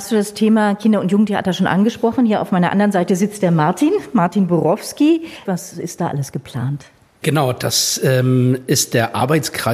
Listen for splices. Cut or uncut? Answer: cut